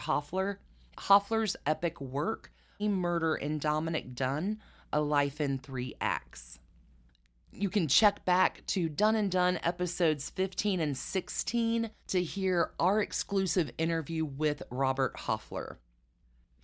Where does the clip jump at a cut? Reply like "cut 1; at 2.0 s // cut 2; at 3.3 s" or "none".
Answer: cut 1; at 2.8 s // cut 2; at 12.0 s